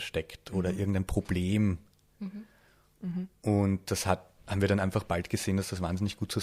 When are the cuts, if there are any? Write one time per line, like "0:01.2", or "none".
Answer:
none

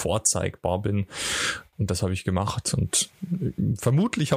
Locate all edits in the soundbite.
0:01.7

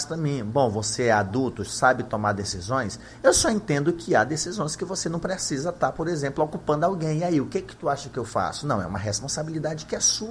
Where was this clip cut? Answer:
none

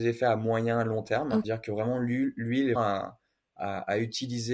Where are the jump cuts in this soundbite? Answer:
0:01.4
0:02.8

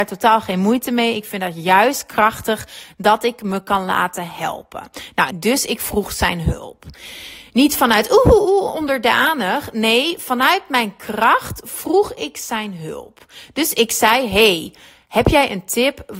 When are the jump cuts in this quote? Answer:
0:05.3

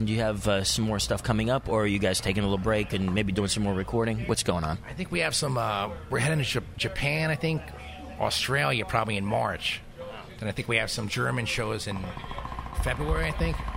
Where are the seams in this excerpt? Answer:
none

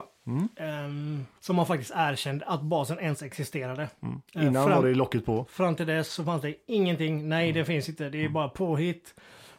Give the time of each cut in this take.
0:01.4

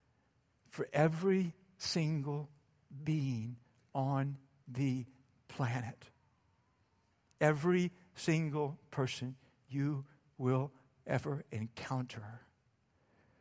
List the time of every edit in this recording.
none

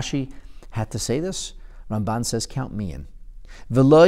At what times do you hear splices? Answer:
none

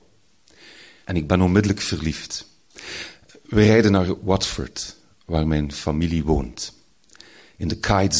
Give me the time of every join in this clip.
0:01.0

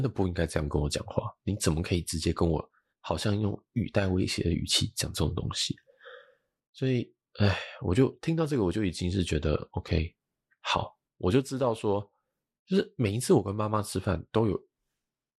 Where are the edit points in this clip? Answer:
none

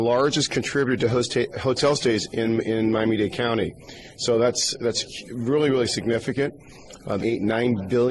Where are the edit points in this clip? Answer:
0:04.1
0:07.2

